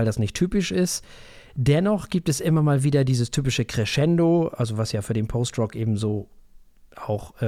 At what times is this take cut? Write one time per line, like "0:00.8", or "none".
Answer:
none